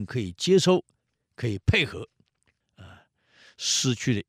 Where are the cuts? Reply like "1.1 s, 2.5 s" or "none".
2.6 s